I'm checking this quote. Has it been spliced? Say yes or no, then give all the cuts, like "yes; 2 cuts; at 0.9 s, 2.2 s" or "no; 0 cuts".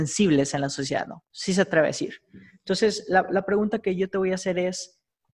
yes; 1 cut; at 1.2 s